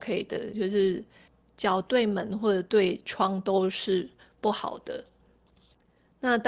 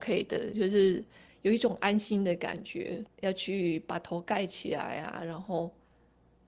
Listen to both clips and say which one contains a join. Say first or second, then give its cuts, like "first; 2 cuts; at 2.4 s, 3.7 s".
second; 2 cuts; at 1.3 s, 3.1 s